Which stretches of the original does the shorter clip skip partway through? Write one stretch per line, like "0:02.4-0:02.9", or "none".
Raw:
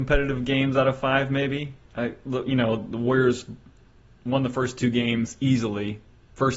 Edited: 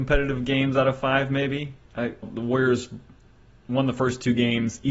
0:02.2-0:02.8

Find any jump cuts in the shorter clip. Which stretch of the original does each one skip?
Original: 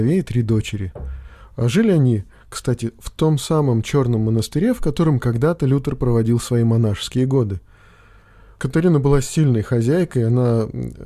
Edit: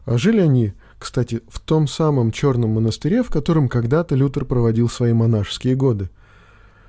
none

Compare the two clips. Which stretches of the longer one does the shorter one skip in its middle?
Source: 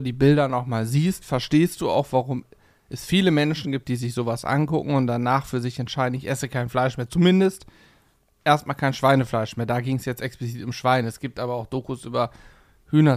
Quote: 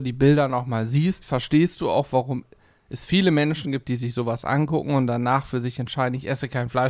none

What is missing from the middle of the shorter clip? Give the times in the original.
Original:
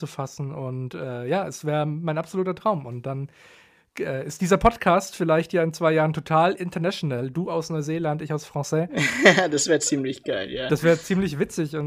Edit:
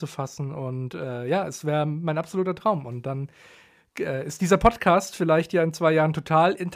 none

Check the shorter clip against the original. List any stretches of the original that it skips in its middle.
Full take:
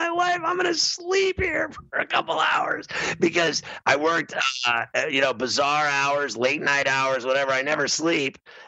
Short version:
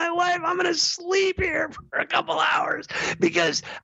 none

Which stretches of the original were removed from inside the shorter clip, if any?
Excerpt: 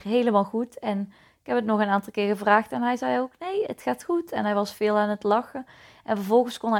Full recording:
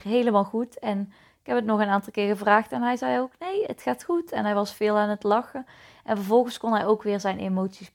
none

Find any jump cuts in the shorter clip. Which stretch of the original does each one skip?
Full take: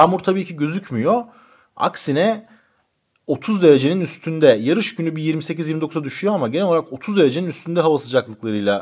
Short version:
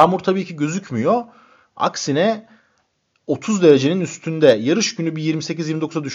none

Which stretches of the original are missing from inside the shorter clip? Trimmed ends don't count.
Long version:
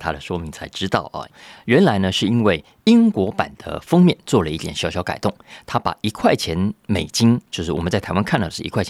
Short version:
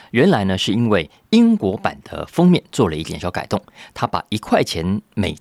0:04.7-0:04.9

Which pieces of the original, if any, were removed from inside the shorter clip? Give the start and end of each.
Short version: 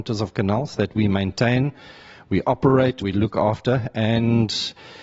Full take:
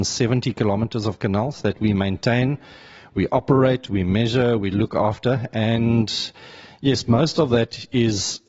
0:03.9-0:04.6

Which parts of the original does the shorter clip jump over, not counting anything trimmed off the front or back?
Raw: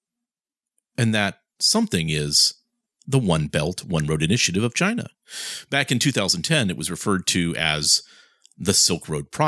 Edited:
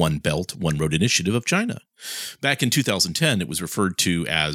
none

